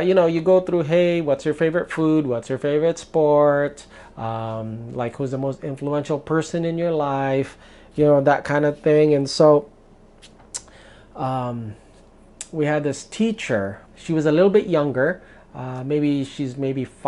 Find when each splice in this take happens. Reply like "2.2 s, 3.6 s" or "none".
13.9 s